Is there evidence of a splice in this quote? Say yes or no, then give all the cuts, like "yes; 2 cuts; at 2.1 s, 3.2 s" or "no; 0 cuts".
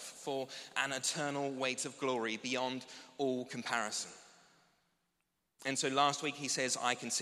no; 0 cuts